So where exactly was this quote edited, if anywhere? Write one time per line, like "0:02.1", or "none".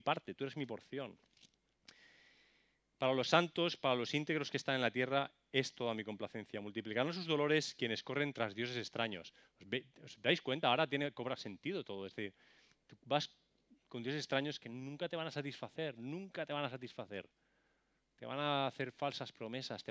none